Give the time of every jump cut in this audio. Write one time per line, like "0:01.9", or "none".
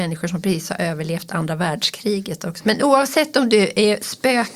0:02.6